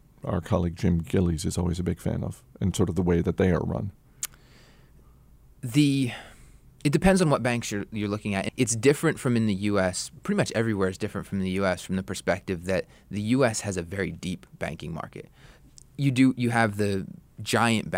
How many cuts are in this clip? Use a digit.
1